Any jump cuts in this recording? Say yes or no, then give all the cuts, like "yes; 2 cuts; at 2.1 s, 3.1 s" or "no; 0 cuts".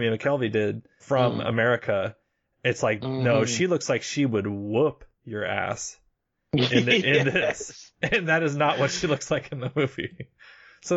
yes; 1 cut; at 1.0 s